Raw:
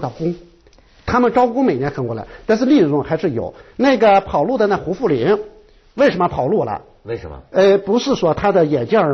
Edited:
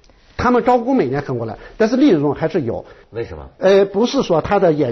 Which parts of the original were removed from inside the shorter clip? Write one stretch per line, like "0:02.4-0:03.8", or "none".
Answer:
0:03.7-0:07.0